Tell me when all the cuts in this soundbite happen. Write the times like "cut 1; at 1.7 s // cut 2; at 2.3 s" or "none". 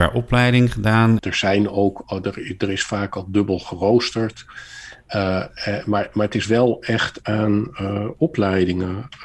cut 1; at 1.2 s